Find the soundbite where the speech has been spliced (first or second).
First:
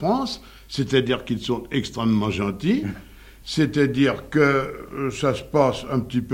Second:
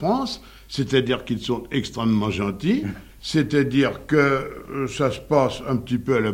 second